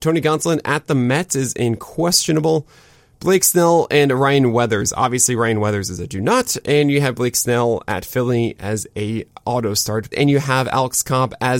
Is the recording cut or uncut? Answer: cut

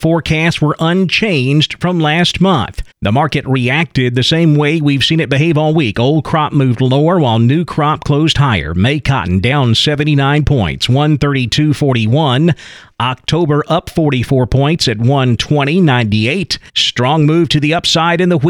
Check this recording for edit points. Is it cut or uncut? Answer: cut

